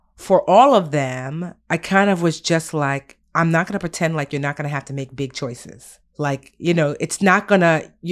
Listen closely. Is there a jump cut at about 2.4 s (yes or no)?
no